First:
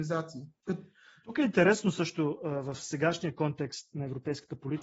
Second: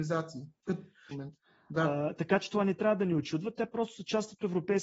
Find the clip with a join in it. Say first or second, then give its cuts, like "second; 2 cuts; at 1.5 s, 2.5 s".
second; 1 cut; at 1.1 s